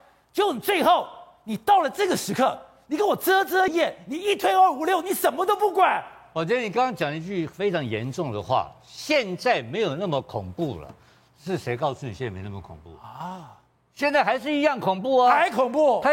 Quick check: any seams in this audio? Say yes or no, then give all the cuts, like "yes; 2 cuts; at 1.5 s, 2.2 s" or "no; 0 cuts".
yes; 1 cut; at 3.7 s